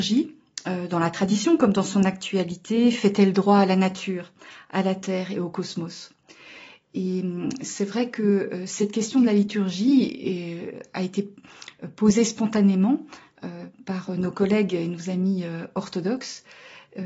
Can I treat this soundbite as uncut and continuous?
yes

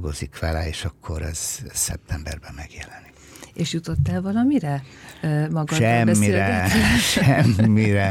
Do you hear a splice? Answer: no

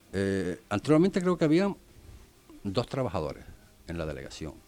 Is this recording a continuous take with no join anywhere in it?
yes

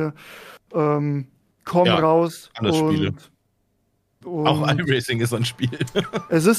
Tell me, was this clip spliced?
no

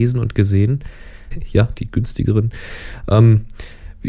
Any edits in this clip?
yes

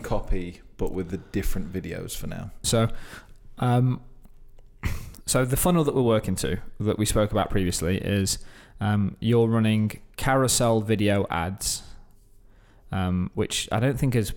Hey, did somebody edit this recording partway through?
yes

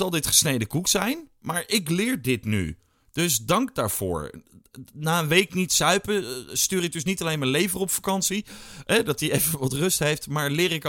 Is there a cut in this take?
no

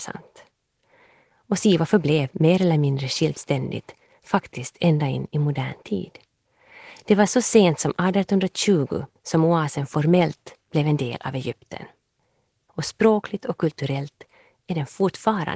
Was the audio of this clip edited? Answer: no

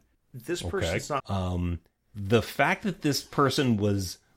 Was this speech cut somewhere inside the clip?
yes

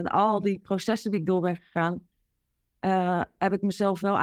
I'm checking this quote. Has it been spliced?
no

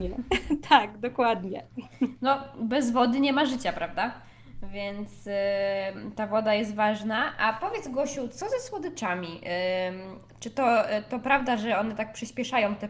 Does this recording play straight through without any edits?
yes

